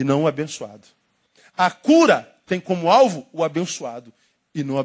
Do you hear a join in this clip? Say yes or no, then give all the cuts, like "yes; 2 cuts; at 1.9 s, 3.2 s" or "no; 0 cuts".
no; 0 cuts